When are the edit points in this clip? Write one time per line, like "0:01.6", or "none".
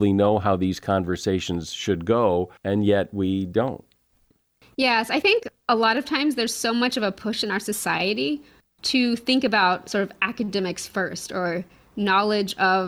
0:02.6